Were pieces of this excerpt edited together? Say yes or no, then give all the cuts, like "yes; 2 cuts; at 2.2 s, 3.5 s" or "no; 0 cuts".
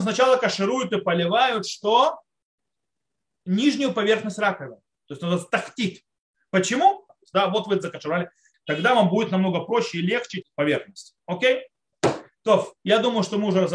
yes; 3 cuts; at 7.1 s, 8.5 s, 10.4 s